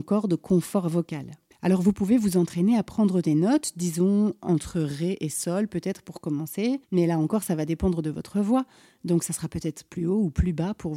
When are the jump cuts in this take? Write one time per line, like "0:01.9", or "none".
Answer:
0:01.5
0:06.8